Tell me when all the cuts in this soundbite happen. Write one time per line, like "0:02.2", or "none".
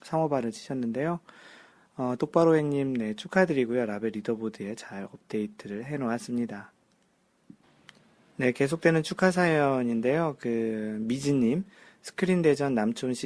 none